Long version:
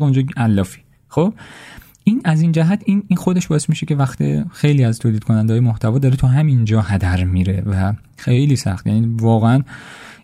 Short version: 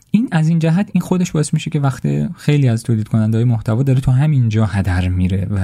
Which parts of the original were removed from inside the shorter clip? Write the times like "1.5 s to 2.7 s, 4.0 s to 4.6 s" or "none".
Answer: 2.8 s to 3.1 s